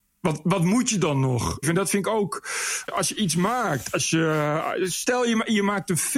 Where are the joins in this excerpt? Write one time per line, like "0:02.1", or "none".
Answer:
0:01.6